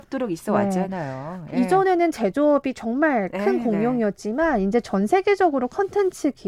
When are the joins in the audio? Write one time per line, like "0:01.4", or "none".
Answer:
none